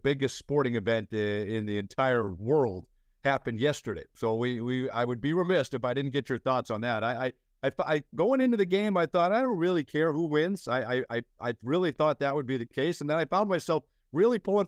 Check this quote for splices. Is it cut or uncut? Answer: uncut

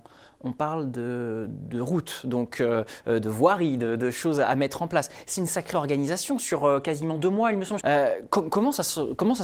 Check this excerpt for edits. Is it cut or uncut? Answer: cut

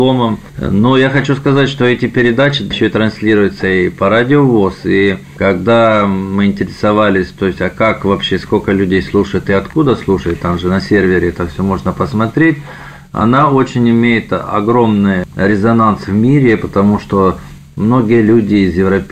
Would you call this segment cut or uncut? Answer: uncut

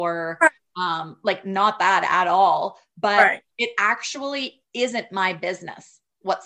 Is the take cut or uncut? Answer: uncut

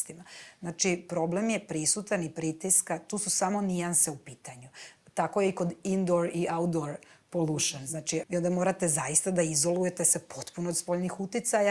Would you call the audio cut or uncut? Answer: cut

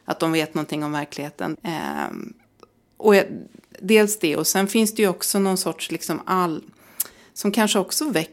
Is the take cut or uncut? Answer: cut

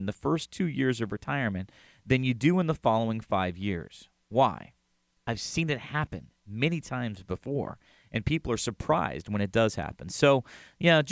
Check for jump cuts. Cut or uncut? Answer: uncut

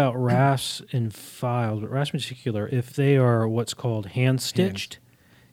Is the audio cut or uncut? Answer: uncut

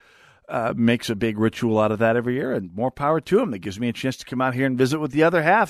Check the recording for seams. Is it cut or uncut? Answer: uncut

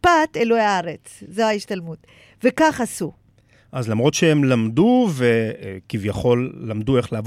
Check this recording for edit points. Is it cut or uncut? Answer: uncut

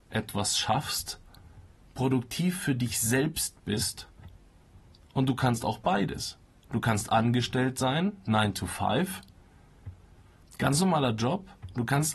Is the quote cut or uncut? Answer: uncut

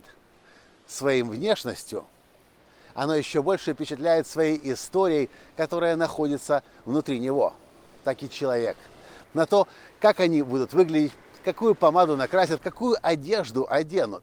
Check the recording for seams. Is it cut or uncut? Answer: cut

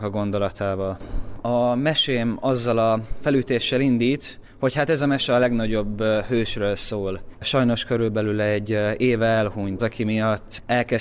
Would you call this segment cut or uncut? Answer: cut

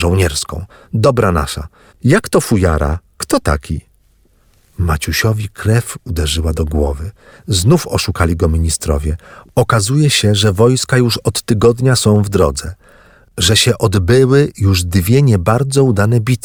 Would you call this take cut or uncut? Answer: cut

